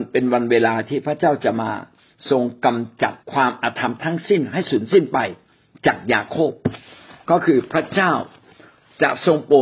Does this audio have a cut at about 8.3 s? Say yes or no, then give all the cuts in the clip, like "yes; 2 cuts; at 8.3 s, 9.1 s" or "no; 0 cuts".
no; 1 cut; at 3.2 s